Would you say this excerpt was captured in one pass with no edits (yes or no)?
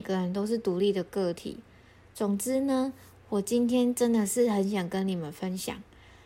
yes